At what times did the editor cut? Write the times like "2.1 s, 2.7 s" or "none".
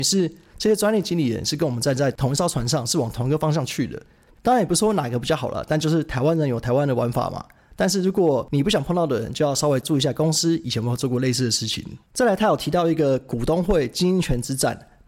4.3 s